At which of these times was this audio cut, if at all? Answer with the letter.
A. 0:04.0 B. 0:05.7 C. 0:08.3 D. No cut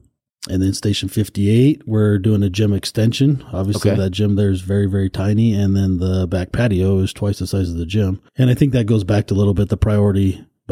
C